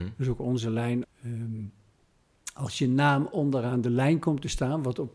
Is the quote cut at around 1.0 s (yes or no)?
yes